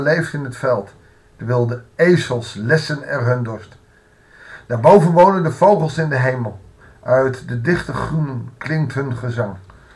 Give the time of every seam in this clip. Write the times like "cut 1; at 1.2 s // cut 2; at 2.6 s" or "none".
none